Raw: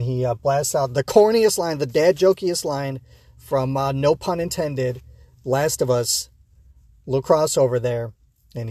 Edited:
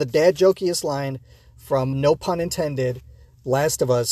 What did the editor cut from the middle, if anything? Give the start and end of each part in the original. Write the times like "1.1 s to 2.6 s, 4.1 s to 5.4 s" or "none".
3.7 s to 3.9 s